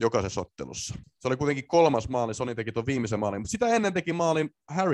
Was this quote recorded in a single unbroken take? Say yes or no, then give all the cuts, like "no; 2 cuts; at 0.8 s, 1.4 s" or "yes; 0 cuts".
no; 1 cut; at 1.0 s